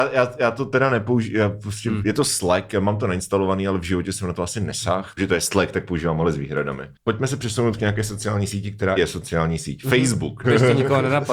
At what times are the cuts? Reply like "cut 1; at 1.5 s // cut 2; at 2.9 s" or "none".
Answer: cut 1; at 5.2 s // cut 2; at 9.0 s // cut 3; at 10.4 s